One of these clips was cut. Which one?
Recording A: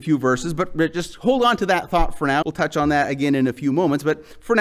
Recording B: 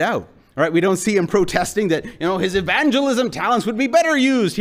A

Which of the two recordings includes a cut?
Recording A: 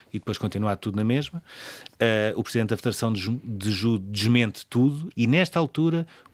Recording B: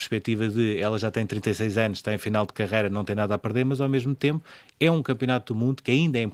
A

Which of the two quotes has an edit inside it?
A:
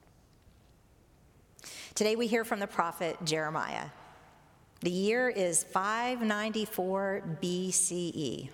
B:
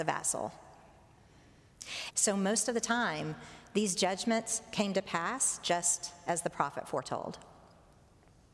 B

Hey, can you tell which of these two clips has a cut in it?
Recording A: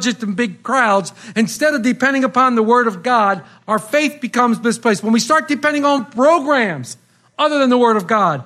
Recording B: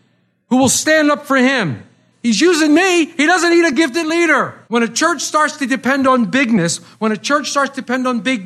B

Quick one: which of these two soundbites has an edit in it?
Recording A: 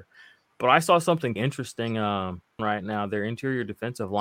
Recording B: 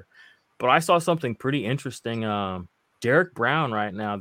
A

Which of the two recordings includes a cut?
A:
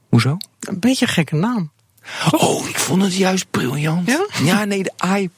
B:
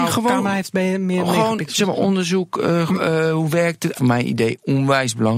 B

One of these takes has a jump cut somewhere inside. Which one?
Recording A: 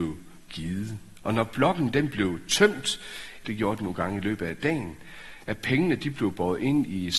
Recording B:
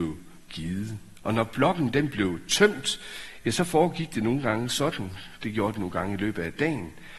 A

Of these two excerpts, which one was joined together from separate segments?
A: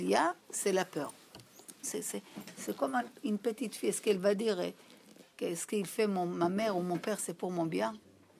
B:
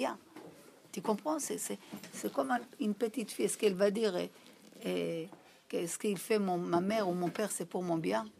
A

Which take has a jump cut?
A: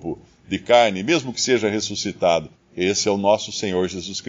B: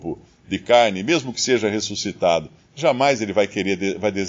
A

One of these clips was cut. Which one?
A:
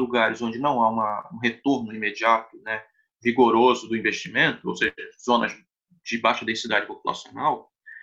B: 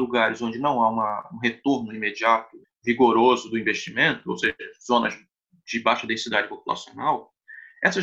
B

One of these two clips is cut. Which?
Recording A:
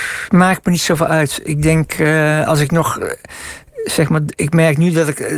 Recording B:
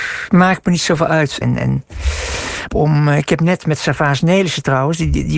B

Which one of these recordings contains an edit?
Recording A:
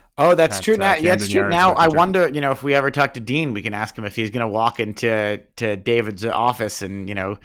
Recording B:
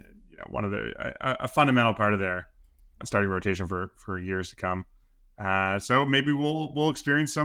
B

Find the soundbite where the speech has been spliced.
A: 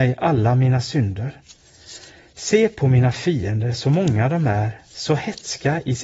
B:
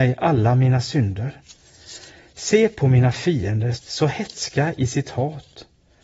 B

